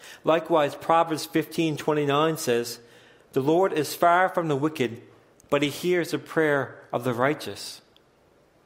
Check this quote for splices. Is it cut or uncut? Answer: uncut